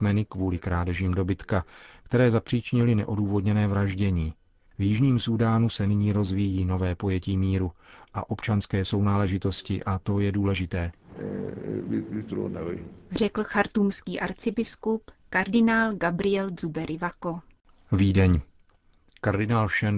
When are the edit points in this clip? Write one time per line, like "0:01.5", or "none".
0:04.7